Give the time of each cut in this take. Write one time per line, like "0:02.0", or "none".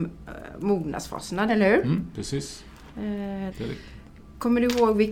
0:01.5
0:03.5